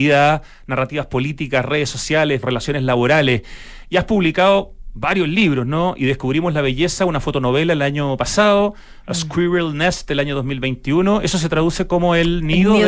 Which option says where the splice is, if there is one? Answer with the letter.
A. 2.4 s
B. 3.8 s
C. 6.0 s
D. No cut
A